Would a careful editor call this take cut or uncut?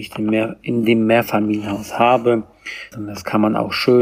cut